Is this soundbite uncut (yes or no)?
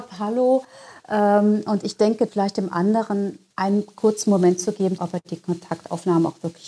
no